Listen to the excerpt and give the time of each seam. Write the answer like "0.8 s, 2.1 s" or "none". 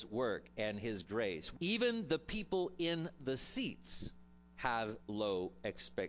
1.5 s, 5.0 s